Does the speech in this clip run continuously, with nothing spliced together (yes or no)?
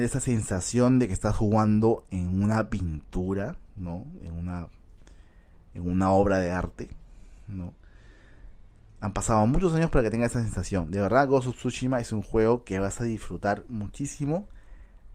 yes